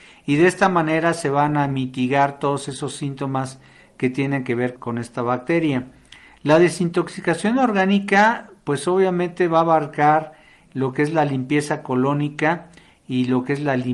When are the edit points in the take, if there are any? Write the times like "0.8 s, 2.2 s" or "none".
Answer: 4.8 s